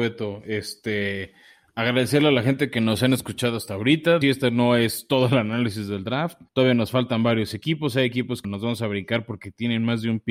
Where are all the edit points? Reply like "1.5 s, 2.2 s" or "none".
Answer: 4.2 s, 6.5 s, 8.4 s